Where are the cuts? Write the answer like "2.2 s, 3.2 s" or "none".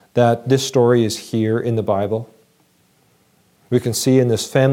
3.7 s